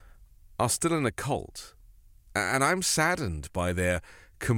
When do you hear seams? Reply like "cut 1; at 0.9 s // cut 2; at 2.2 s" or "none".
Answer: cut 1; at 2.3 s